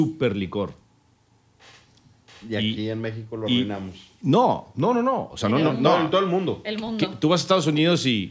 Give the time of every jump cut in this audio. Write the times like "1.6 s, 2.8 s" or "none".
none